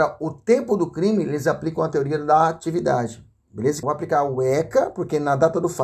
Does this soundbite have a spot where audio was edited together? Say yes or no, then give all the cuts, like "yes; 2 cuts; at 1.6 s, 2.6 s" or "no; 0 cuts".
yes; 1 cut; at 3.8 s